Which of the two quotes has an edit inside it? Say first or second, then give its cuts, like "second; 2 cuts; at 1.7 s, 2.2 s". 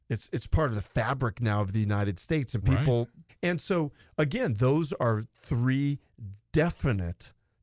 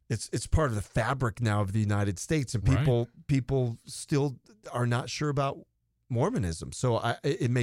first; 1 cut; at 3.3 s